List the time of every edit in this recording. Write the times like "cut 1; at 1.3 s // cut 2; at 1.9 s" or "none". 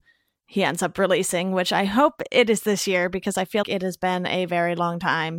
cut 1; at 3.6 s